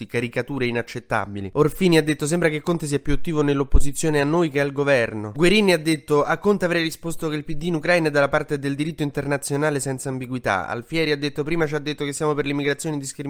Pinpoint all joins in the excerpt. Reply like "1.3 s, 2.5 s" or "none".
1.5 s, 5.3 s